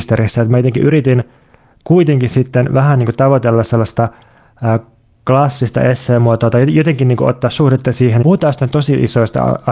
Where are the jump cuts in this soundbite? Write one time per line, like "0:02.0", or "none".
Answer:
0:08.2